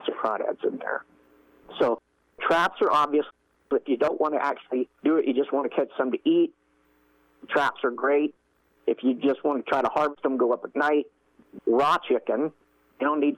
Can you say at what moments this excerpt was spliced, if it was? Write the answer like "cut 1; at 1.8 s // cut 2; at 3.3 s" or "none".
cut 1; at 11.6 s